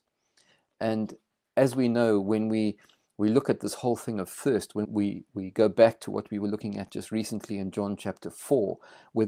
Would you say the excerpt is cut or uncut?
cut